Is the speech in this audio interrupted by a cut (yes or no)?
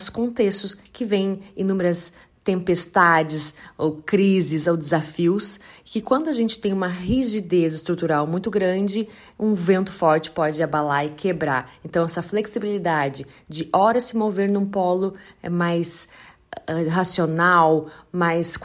no